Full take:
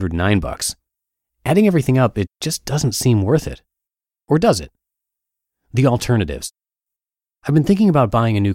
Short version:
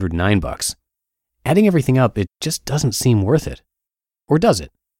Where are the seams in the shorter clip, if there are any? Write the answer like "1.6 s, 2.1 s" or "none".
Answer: none